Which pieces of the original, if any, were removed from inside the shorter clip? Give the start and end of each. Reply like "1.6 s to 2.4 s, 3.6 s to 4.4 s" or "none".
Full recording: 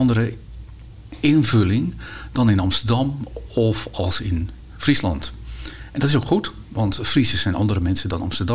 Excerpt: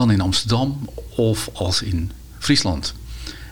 none